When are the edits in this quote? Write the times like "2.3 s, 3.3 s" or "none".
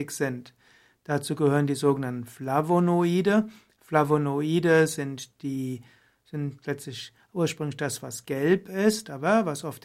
none